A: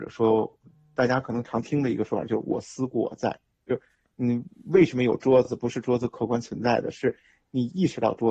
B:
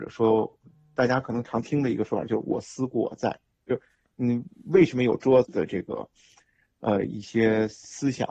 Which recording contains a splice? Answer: B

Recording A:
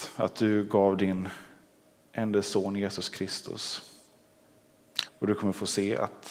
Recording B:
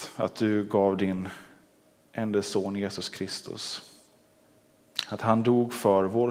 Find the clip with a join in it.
A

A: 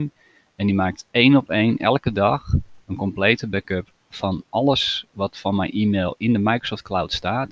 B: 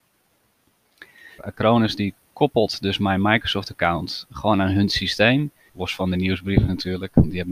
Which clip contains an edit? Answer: B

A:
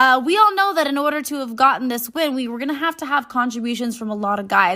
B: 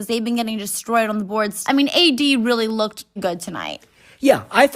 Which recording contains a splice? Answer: B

